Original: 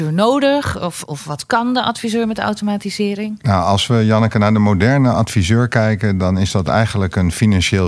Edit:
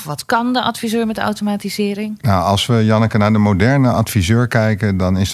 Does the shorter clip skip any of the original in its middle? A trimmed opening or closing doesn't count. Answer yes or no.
no